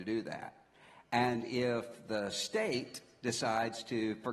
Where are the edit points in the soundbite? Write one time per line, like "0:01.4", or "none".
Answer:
none

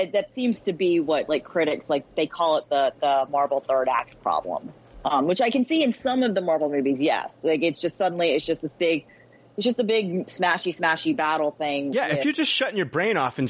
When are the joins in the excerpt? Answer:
none

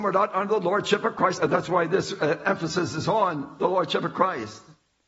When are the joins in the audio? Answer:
0:01.4

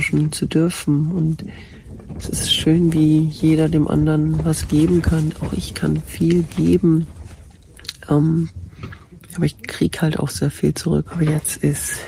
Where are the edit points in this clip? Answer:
0:11.1

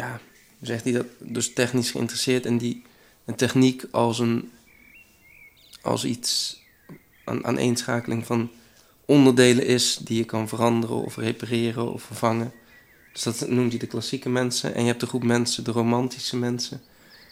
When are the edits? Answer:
none

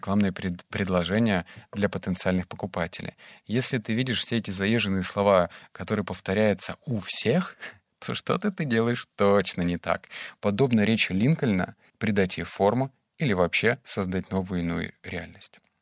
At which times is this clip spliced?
0:10.4
0:11.9

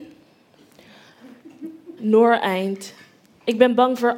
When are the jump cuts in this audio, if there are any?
0:02.0

